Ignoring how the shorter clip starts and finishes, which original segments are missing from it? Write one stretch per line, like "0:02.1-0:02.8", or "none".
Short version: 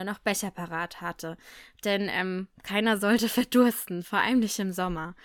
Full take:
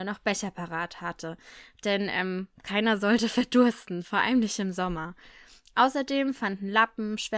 none